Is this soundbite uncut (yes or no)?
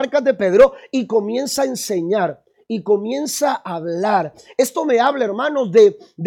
yes